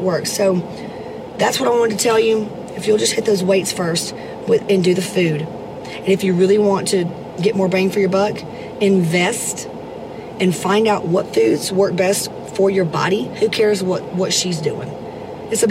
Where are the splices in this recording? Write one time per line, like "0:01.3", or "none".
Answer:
0:02.7